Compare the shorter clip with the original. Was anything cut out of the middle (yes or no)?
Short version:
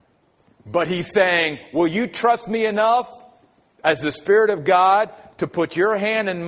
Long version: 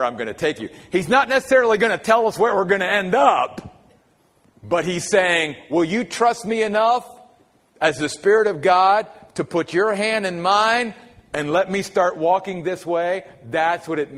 no